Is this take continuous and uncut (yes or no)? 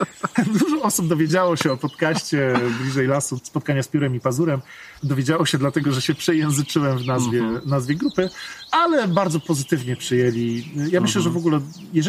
yes